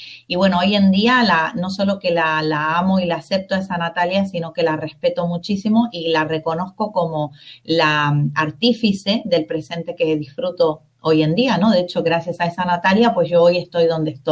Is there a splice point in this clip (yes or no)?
no